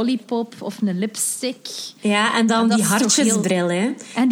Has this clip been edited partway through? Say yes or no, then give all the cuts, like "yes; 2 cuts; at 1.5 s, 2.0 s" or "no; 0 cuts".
no; 0 cuts